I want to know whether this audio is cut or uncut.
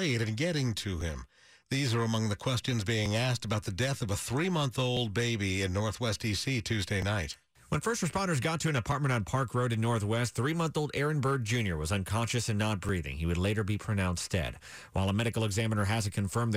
uncut